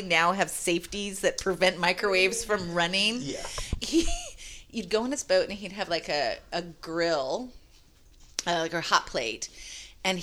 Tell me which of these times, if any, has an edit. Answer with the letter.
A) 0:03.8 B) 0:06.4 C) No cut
A